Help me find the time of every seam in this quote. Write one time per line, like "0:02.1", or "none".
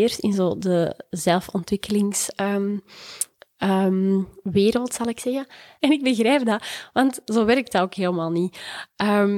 0:05.8